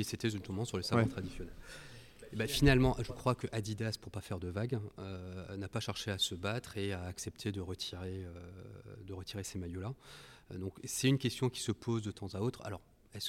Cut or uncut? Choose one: uncut